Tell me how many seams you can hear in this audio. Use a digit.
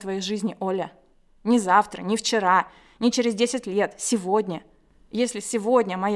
0